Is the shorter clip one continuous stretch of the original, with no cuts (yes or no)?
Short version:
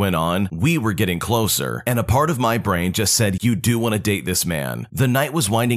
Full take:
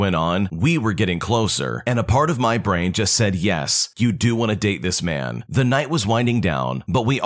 no